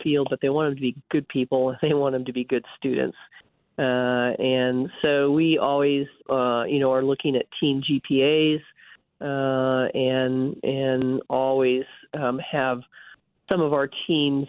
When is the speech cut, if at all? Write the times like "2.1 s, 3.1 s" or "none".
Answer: 6.2 s